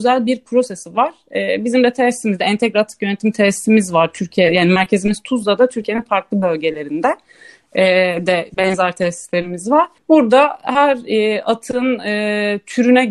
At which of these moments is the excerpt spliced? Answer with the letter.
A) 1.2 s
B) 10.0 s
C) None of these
B